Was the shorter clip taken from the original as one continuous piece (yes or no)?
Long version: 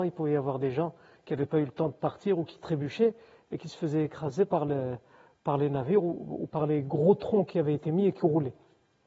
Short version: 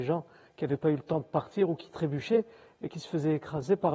yes